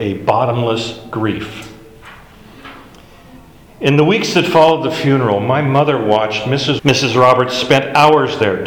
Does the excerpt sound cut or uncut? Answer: cut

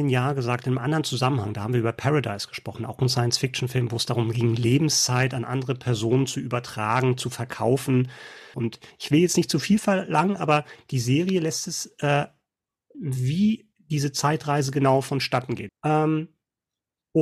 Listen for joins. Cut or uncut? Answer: cut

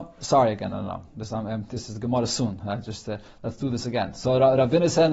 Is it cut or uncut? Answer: uncut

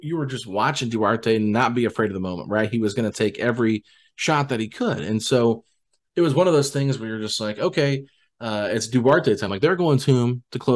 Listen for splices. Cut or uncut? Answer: uncut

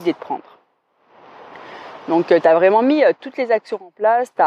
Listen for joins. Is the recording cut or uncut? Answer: uncut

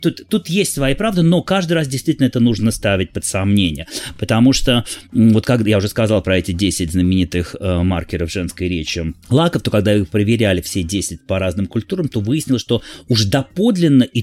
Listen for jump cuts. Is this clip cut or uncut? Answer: uncut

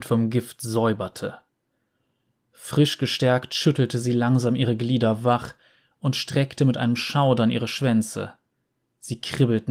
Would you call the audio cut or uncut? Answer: uncut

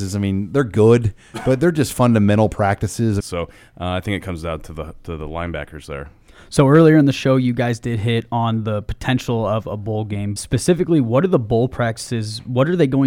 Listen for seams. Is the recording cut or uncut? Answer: cut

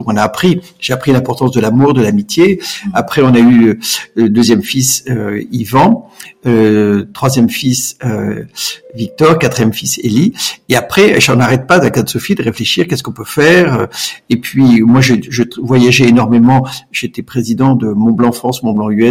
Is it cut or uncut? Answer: uncut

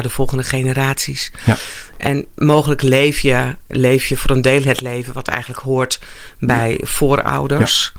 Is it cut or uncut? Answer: uncut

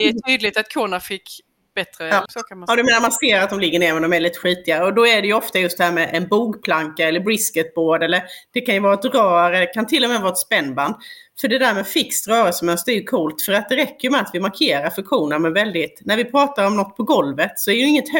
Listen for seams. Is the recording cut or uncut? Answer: cut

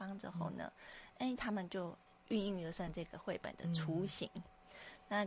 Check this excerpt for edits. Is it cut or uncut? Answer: uncut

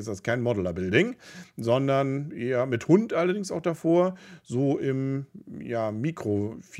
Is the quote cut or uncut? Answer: uncut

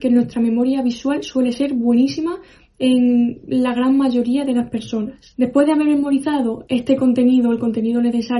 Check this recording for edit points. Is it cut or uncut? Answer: uncut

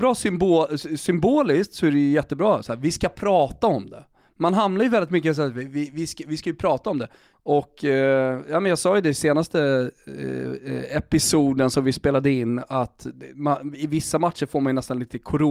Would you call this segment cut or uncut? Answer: cut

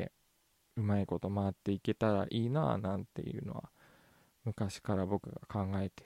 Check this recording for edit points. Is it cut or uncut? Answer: uncut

